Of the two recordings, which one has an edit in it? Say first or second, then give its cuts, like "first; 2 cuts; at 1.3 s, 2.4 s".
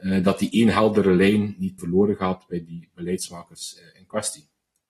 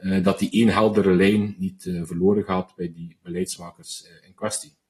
first; 1 cut; at 1.8 s